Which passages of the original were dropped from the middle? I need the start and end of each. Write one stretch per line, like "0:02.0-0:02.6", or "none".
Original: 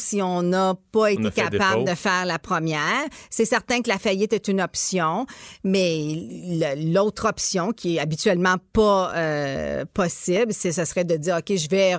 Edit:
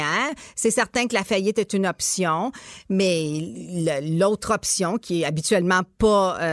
none